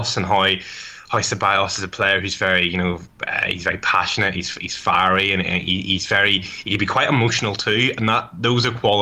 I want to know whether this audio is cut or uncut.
uncut